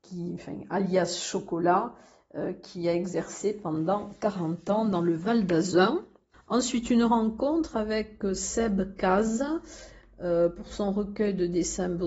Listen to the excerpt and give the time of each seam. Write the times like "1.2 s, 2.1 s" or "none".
6.3 s

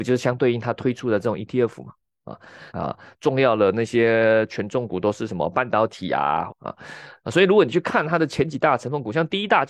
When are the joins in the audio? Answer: 2.7 s, 6.5 s

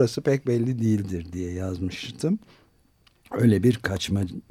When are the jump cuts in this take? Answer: none

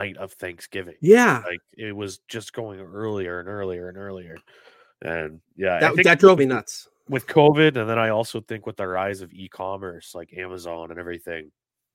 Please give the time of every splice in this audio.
6.4 s

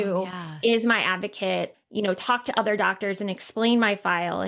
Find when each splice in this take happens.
1.7 s

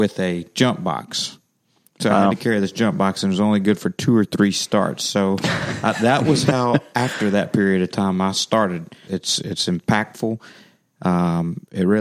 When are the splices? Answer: 9.1 s

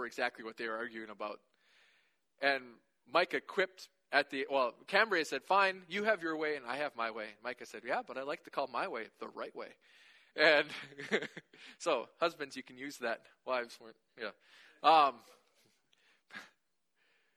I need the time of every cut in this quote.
none

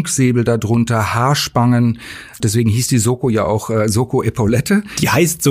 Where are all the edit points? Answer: 2.4 s

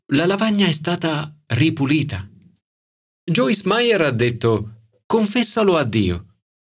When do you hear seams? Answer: 5.0 s

